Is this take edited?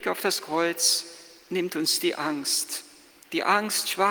no; 0 cuts

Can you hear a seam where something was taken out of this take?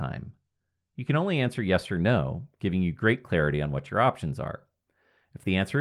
no; 0 cuts

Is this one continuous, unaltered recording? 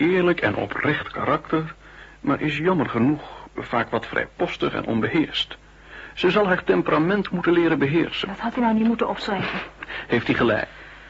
yes; 0 cuts

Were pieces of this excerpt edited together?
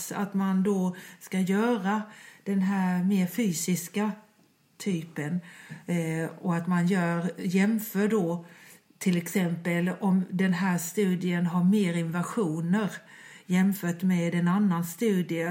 no; 0 cuts

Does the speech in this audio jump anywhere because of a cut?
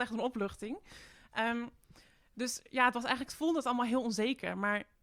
no; 0 cuts

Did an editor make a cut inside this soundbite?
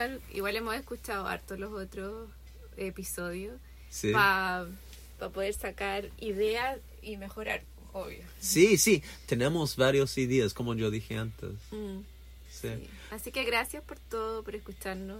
no; 0 cuts

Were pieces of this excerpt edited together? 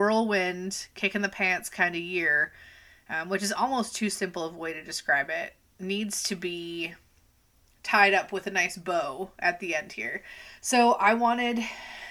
no; 0 cuts

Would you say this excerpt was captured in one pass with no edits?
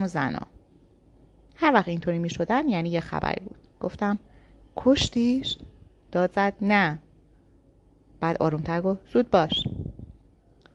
yes; 0 cuts

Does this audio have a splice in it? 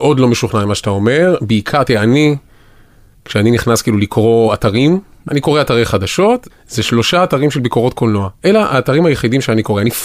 yes; 2 cuts; at 5.3 s, 6.5 s

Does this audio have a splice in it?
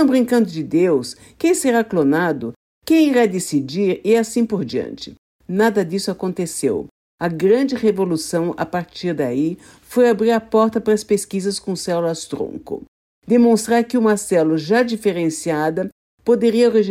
no; 0 cuts

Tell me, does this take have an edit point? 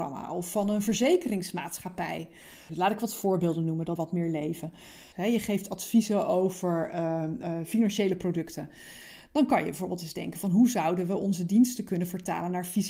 yes; 3 cuts; at 2.7 s, 4.0 s, 5.1 s

